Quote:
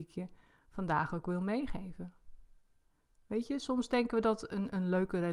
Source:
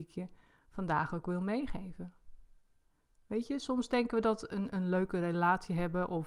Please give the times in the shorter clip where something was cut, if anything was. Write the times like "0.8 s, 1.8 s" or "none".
none